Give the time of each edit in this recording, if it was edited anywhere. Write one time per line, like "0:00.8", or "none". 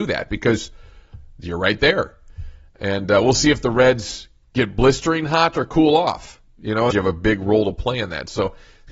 0:06.9